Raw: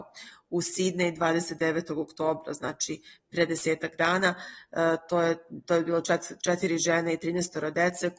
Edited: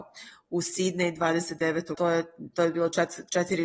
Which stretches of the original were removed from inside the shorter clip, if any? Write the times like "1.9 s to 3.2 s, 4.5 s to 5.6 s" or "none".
1.9 s to 5.1 s